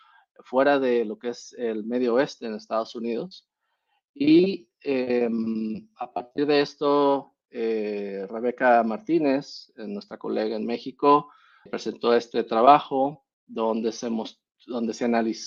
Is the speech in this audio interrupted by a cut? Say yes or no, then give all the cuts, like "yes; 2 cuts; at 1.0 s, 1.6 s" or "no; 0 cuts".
yes; 2 cuts; at 11.7 s, 13.3 s